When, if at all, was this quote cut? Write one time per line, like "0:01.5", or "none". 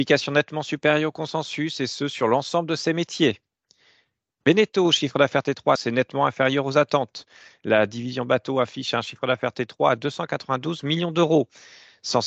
0:05.8